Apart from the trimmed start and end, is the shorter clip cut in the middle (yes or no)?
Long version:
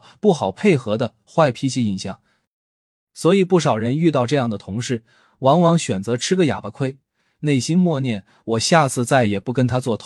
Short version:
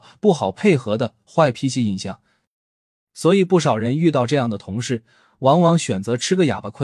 no